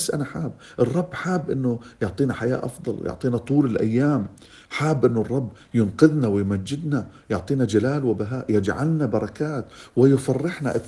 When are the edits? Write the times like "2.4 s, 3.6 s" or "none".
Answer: none